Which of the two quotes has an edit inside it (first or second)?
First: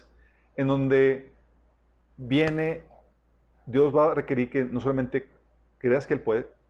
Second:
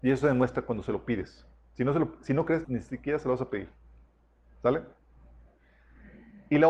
second